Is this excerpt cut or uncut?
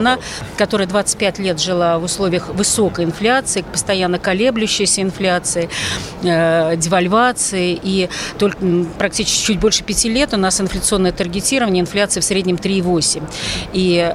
cut